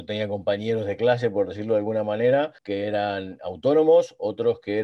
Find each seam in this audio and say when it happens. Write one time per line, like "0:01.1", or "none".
0:02.6